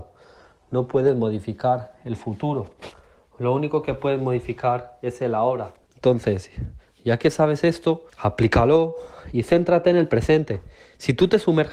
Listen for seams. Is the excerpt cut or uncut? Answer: cut